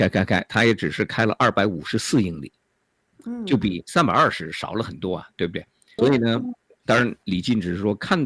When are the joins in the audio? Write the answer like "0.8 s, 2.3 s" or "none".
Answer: 6.0 s